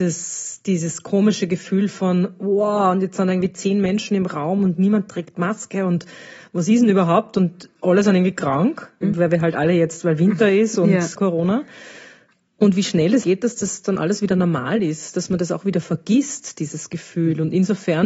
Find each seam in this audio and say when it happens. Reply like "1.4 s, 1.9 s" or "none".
9.0 s, 11.2 s, 13.2 s